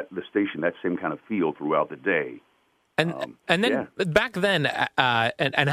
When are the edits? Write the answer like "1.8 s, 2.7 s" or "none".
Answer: none